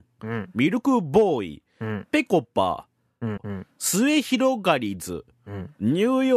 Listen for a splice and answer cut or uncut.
cut